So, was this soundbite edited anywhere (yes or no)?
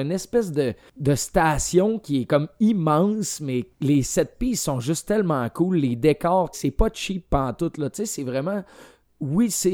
yes